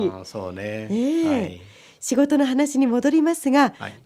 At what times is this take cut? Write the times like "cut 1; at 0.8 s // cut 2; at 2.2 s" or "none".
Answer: none